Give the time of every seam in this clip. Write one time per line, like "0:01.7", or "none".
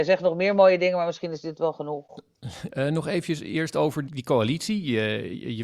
0:02.7
0:04.1